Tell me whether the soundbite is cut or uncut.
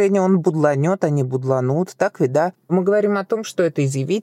uncut